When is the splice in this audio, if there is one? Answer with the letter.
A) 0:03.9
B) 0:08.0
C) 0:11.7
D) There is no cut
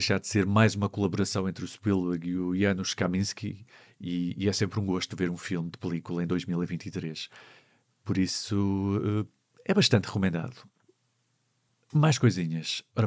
D